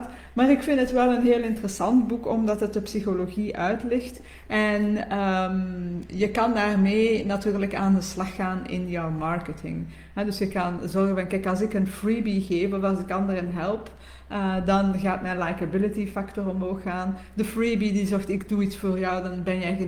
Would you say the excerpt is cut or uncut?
uncut